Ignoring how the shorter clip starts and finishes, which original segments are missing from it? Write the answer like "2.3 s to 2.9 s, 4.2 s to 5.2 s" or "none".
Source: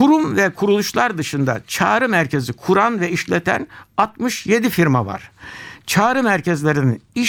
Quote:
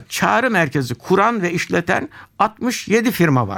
none